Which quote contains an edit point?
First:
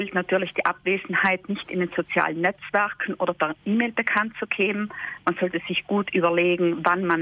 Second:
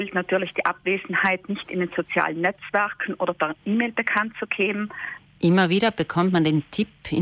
second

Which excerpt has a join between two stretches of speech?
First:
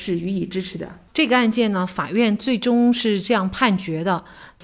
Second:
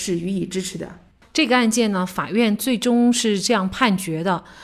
first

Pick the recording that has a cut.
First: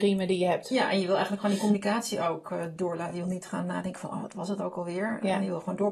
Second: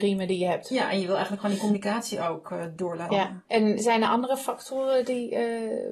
second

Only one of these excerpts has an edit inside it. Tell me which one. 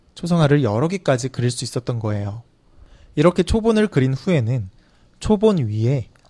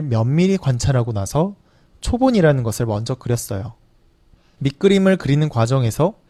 second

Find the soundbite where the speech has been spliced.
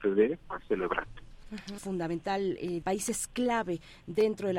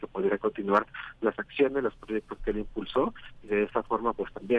first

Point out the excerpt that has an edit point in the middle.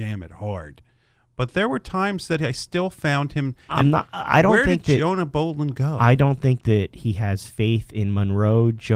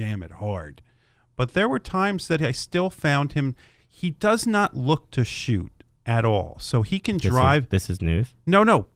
first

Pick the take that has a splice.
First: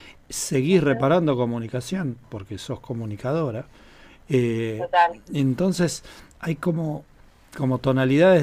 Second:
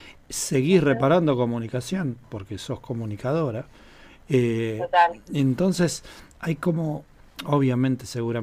second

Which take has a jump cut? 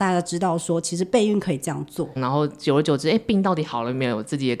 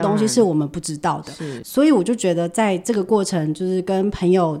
first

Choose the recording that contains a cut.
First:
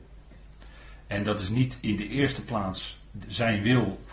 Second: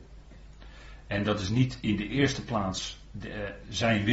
first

